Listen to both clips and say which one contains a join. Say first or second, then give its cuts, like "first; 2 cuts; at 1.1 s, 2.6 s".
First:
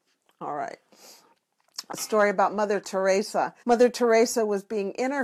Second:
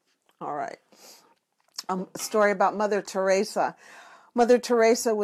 first; 2 cuts; at 1.9 s, 3.6 s